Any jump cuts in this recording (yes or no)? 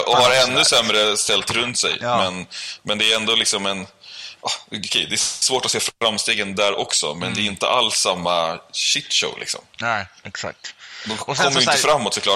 no